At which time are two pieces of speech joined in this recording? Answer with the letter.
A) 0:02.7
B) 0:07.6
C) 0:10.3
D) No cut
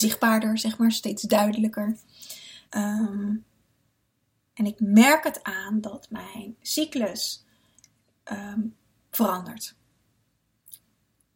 A